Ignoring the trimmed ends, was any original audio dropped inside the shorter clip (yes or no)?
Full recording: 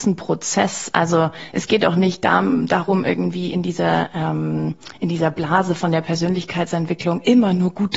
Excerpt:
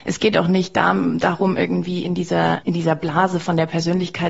yes